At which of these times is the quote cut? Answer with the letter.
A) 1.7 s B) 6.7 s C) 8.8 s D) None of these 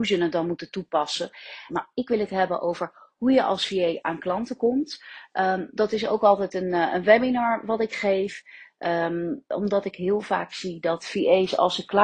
A